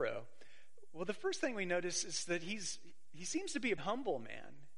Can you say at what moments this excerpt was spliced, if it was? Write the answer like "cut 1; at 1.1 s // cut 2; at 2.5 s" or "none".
cut 1; at 3.8 s